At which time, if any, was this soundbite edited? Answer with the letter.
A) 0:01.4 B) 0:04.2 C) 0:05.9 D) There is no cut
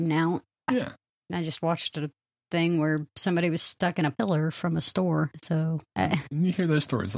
C